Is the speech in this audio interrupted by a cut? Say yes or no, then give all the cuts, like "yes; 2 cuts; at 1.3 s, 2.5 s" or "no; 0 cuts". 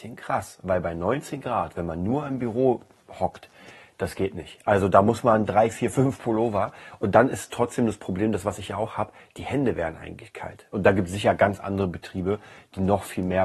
yes; 1 cut; at 10.7 s